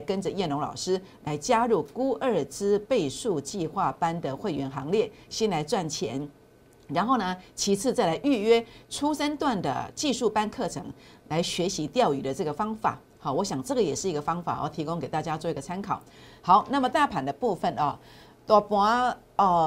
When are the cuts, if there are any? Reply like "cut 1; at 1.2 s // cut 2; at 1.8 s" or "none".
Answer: none